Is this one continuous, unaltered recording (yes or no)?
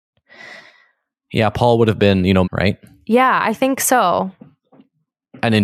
no